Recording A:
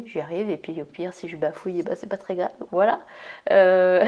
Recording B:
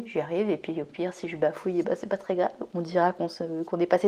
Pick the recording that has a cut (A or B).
A